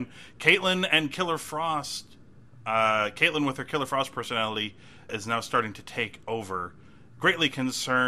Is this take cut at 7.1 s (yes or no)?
yes